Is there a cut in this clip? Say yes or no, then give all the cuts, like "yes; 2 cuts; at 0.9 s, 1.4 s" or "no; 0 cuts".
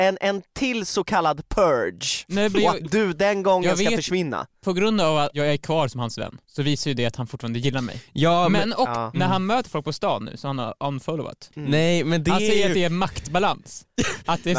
yes; 2 cuts; at 6.4 s, 11.5 s